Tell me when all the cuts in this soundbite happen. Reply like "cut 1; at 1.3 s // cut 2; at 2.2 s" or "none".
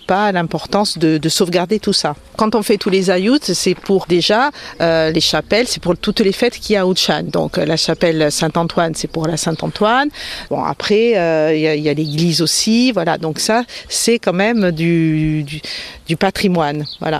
cut 1; at 4.0 s // cut 2; at 10.5 s